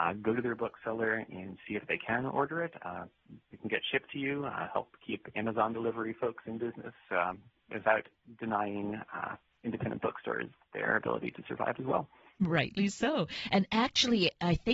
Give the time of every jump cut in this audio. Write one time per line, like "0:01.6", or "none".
none